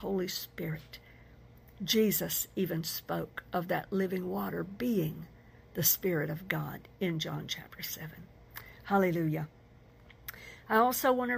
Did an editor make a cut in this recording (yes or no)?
no